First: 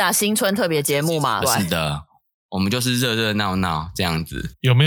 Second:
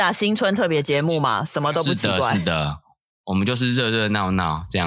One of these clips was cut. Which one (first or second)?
first